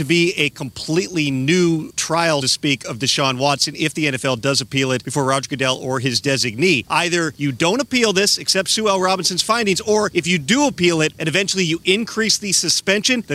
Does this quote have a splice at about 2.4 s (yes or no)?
yes